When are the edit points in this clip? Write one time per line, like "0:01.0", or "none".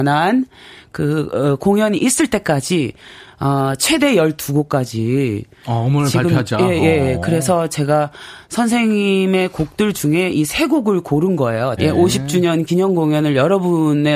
0:11.8